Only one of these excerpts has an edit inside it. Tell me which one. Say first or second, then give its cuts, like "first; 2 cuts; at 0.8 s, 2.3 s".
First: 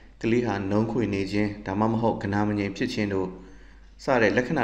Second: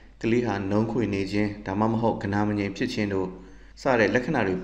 second; 1 cut; at 3.7 s